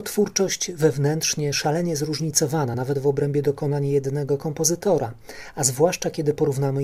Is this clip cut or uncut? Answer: uncut